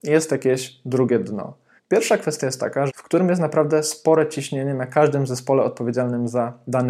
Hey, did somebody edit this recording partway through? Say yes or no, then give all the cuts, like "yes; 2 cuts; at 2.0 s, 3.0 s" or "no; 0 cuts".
yes; 2 cuts; at 1.8 s, 2.9 s